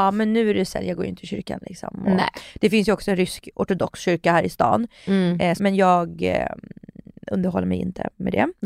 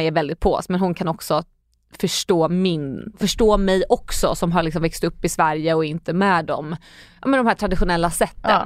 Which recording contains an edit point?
first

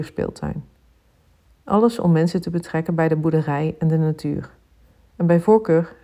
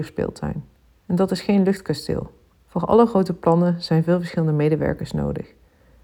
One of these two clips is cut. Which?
second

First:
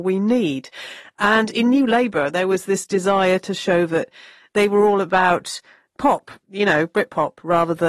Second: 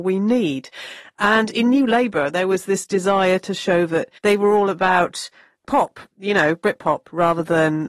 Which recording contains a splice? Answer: second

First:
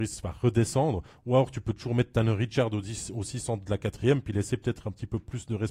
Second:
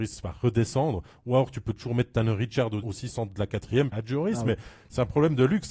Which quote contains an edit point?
second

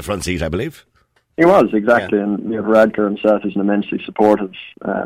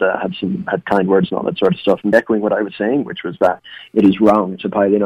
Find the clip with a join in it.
second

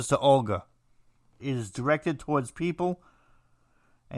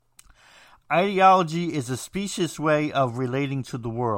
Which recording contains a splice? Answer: first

